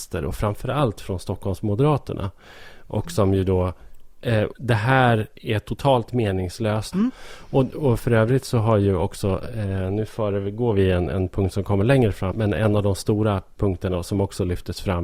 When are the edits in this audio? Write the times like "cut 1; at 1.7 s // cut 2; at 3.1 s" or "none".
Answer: cut 1; at 4.5 s // cut 2; at 6.9 s // cut 3; at 12.3 s